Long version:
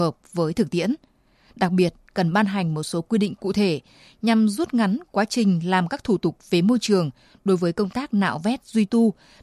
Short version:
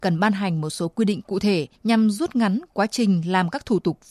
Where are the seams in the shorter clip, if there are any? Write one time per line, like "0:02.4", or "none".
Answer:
0:01.7